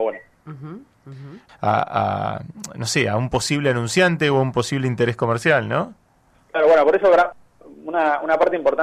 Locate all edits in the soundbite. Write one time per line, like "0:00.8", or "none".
0:01.5